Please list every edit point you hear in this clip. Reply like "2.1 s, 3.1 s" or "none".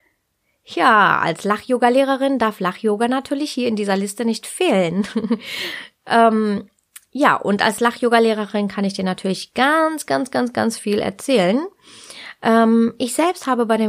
none

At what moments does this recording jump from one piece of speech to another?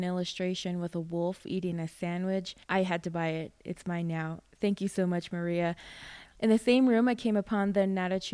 2.6 s

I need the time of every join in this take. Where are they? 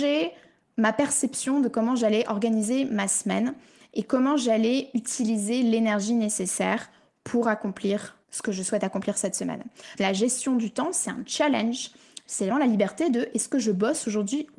8.2 s, 10.0 s, 12.5 s

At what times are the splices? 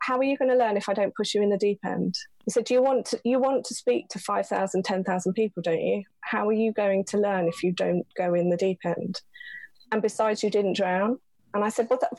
8.1 s

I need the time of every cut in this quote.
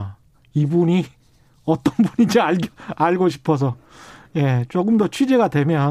none

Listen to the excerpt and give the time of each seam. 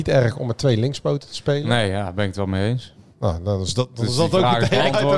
none

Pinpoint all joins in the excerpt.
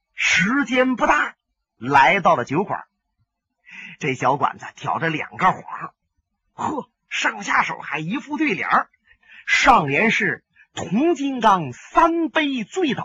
none

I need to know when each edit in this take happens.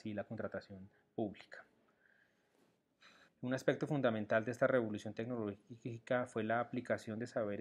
3.3 s

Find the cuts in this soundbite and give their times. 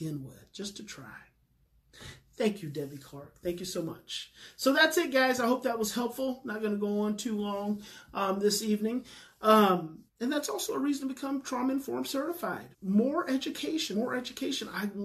10.1 s, 12.7 s, 13.9 s

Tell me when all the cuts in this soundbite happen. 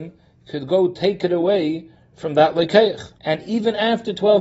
3.2 s

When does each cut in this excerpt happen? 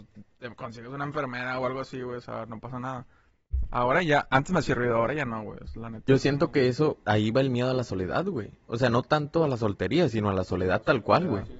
7.0 s

